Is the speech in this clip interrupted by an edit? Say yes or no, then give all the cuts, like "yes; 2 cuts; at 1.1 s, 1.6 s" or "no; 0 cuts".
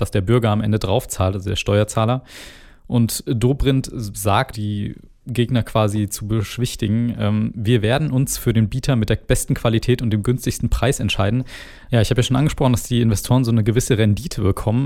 yes; 2 cuts; at 4.5 s, 11.9 s